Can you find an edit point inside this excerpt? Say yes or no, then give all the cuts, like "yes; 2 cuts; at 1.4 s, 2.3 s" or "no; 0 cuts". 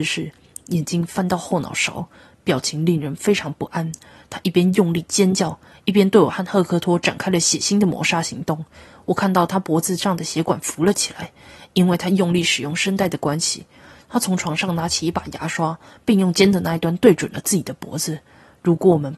no; 0 cuts